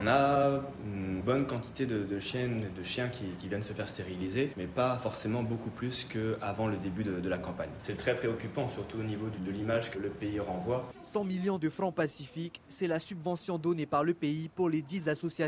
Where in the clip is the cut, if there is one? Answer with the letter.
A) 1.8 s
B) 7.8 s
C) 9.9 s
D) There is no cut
C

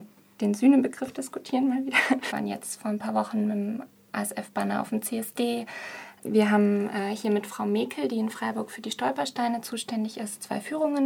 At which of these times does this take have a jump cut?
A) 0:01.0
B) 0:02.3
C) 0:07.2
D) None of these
B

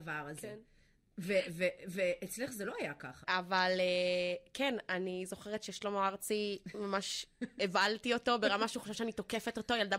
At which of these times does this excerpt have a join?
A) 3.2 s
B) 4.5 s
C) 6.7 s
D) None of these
A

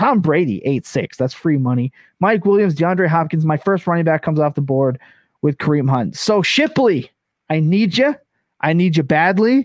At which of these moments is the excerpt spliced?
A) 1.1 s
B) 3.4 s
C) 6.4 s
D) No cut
D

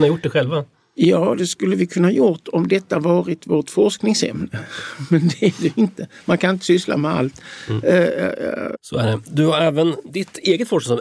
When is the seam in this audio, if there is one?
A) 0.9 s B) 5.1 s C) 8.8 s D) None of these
C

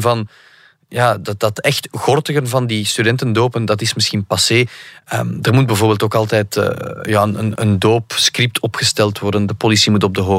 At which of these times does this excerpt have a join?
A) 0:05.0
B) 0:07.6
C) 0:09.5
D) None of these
B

